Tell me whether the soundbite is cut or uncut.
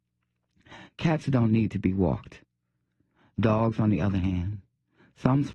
uncut